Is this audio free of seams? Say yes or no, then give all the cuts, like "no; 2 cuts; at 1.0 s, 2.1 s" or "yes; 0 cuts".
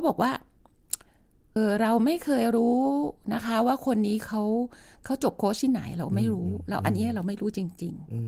no; 1 cut; at 1.6 s